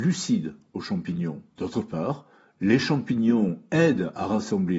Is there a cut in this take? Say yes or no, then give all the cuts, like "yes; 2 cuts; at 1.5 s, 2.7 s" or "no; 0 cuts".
yes; 1 cut; at 1.5 s